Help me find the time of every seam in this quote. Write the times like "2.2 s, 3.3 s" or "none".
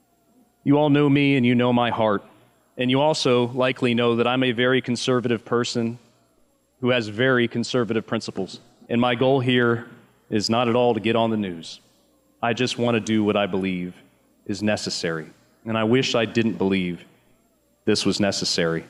8.9 s